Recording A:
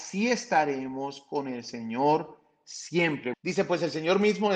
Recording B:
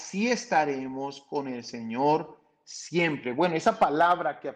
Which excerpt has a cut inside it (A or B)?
A